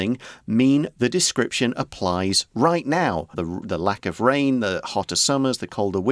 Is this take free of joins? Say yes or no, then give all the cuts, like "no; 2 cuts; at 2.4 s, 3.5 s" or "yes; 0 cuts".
no; 1 cut; at 3.3 s